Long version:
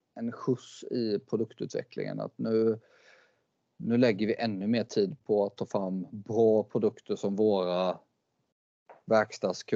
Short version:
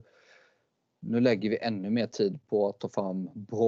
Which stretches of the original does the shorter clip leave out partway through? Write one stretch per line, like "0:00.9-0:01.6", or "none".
none